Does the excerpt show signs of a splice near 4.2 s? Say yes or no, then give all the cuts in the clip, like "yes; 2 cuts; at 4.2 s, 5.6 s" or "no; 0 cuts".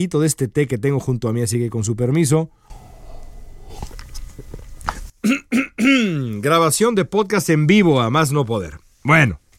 no; 0 cuts